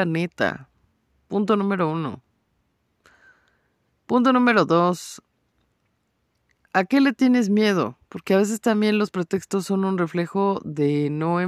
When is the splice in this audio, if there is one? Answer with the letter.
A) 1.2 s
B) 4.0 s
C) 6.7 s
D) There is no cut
D